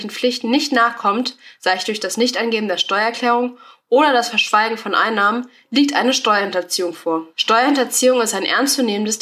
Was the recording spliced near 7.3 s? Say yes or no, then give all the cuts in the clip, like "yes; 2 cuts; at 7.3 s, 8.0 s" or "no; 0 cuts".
yes; 1 cut; at 7.3 s